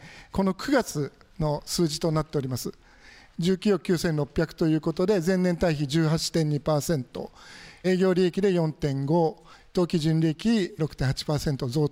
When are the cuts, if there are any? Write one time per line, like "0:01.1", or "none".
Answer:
none